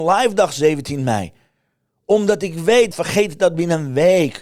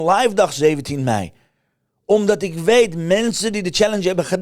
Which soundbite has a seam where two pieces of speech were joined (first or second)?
first